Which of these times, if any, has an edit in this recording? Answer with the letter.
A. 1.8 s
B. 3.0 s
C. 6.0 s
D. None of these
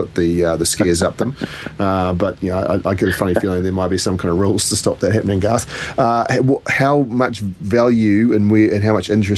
D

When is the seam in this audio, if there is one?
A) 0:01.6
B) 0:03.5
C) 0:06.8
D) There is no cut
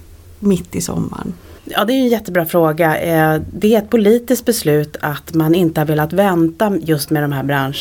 D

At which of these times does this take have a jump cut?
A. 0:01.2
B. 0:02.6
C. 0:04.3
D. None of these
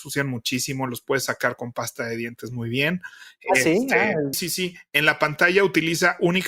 C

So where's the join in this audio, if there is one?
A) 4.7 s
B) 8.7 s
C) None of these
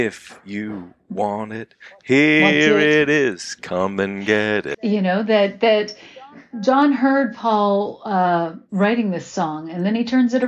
A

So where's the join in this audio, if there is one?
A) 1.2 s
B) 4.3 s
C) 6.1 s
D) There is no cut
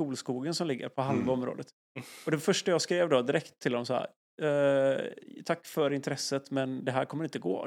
D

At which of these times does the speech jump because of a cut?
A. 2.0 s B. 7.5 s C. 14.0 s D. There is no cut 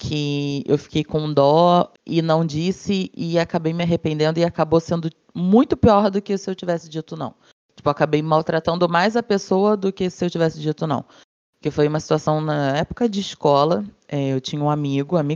A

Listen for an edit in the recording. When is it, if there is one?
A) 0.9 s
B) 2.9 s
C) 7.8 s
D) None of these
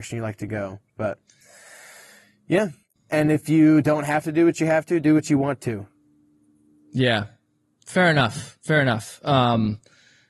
B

